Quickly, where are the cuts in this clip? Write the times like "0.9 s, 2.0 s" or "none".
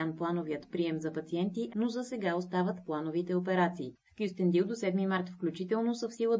1.7 s